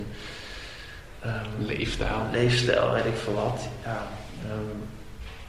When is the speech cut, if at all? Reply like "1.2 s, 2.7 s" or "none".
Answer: none